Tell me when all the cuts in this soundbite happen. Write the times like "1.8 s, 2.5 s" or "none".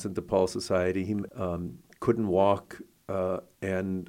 1.3 s